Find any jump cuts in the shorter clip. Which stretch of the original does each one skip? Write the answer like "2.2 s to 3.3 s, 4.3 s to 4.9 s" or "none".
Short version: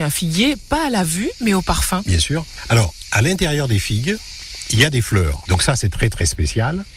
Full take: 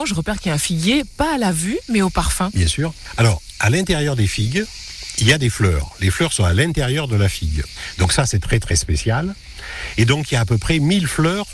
5.9 s to 7.9 s